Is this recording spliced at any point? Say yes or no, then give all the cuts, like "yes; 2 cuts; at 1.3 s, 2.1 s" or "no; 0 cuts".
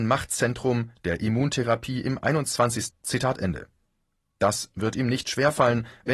yes; 1 cut; at 2.9 s